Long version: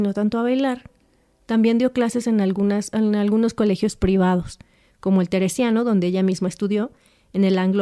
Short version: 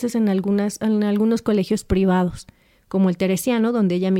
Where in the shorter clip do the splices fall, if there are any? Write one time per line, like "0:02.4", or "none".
none